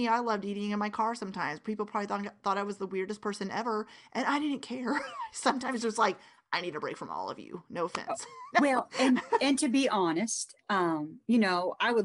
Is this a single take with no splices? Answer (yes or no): no